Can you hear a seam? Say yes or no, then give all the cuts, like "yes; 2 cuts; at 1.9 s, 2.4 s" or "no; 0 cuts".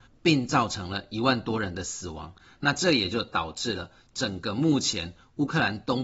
no; 0 cuts